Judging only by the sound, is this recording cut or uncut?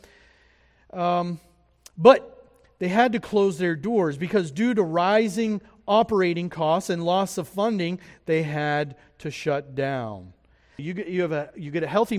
cut